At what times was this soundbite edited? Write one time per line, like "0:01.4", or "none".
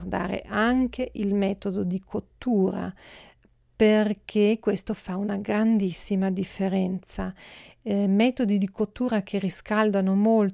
none